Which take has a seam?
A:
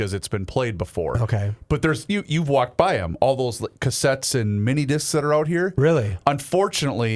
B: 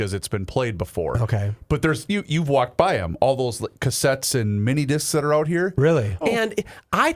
B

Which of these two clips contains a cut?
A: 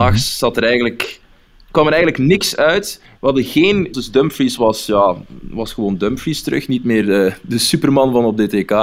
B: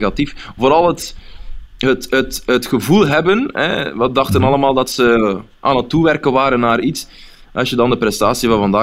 A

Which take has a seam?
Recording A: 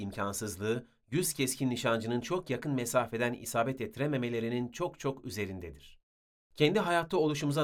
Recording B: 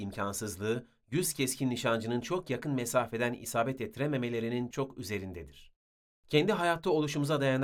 B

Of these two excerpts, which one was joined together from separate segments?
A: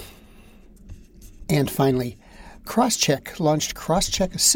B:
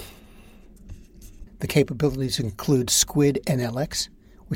B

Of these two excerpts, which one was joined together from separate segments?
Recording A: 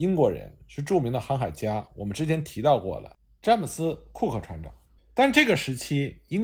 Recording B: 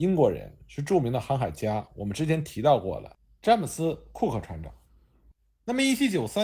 A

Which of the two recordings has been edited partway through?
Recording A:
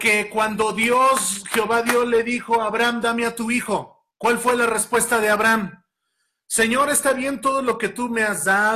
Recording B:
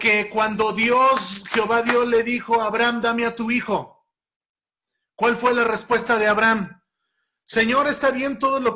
A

